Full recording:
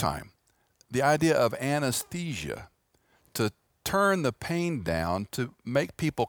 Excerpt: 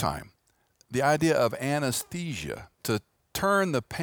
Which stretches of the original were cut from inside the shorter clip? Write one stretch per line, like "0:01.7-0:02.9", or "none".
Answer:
0:02.8-0:03.3